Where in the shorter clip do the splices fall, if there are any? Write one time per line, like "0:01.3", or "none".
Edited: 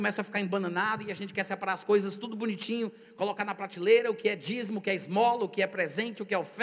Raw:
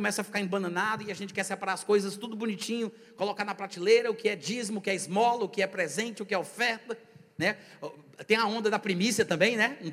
none